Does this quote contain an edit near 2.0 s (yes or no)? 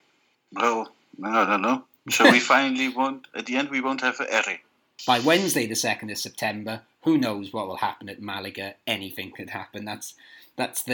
no